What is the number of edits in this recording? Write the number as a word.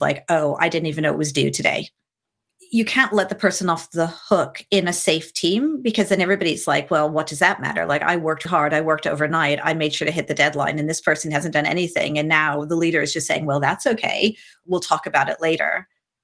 one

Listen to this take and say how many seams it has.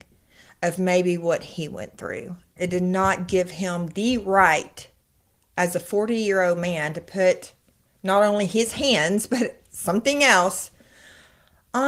one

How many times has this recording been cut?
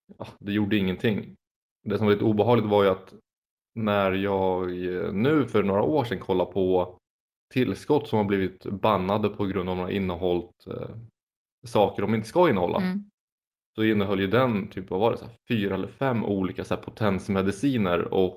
zero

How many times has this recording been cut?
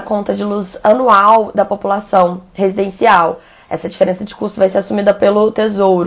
zero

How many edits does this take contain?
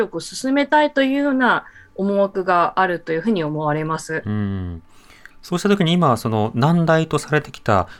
zero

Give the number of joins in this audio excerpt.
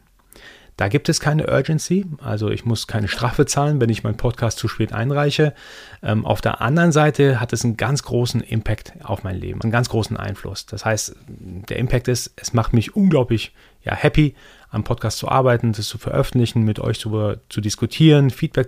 one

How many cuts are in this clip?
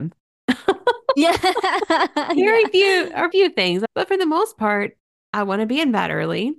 one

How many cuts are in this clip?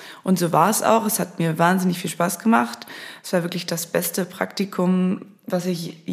zero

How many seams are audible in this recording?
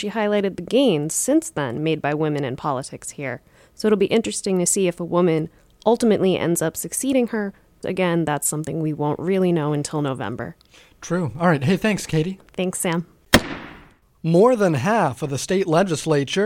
one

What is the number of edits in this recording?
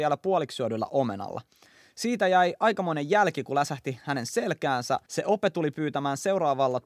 one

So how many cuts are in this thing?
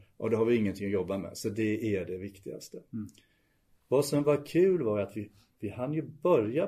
zero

